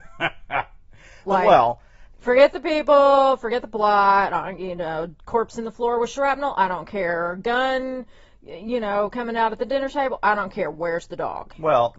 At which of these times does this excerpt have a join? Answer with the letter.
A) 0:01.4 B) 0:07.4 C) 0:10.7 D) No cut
D